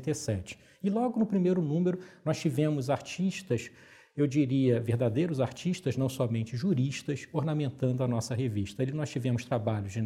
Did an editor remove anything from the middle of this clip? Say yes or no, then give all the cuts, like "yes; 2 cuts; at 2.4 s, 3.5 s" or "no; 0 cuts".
no; 0 cuts